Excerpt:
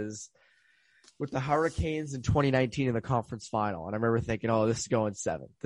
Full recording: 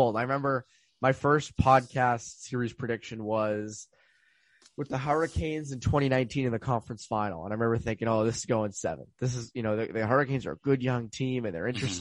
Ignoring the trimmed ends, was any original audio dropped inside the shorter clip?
no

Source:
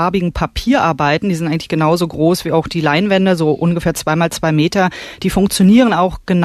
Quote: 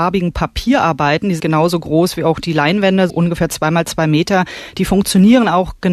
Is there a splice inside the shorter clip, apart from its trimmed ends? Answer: yes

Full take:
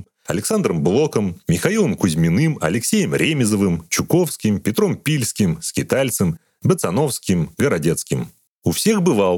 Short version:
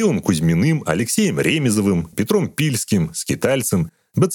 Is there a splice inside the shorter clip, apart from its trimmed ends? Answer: yes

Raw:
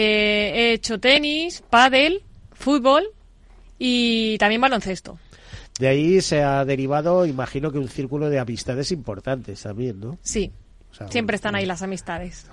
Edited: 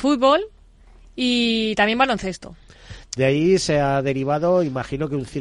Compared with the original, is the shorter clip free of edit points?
yes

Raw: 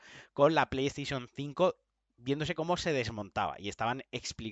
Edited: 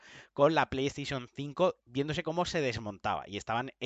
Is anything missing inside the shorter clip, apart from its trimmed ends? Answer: yes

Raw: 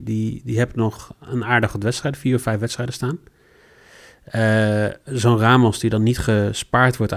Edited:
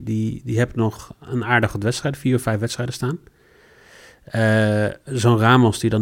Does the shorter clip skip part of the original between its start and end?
no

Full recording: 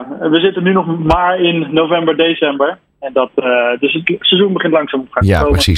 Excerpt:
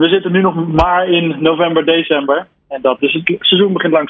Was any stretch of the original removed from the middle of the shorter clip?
yes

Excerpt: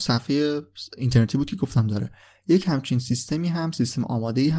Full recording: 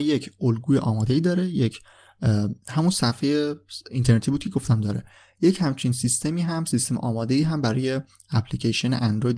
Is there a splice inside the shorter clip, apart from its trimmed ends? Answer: no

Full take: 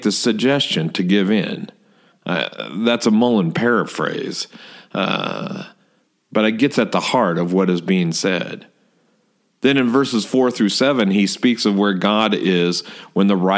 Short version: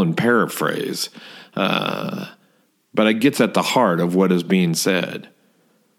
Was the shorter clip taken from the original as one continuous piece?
yes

